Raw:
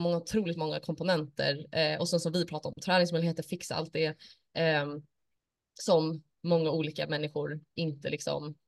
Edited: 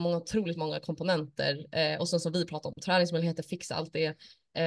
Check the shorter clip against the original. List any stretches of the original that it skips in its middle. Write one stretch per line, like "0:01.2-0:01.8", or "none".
none